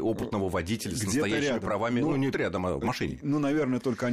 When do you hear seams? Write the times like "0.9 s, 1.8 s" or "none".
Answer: 2.3 s